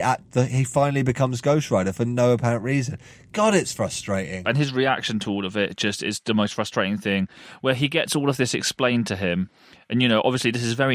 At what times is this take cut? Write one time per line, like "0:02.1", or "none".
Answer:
none